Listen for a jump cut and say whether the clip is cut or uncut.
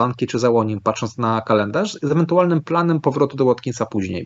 uncut